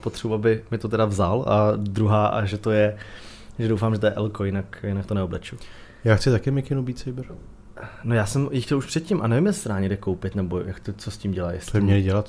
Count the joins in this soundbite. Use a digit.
0